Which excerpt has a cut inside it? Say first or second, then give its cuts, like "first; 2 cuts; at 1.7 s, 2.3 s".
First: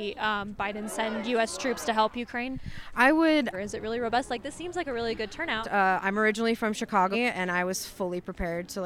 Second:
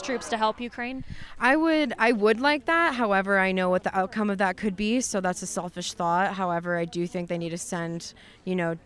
first; 3 cuts; at 3.5 s, 5.6 s, 7.1 s